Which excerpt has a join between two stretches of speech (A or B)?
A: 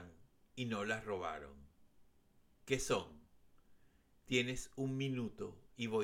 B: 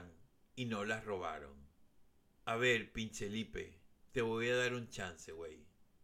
B